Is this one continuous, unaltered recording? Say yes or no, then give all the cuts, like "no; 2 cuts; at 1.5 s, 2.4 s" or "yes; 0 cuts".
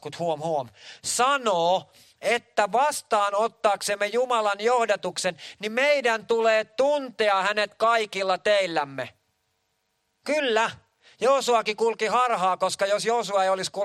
no; 1 cut; at 10.2 s